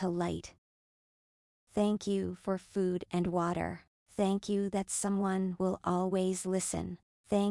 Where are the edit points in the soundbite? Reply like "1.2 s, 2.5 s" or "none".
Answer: none